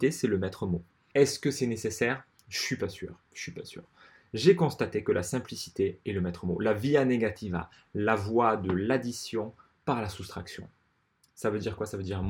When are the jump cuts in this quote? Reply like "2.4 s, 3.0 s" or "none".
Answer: 1.1 s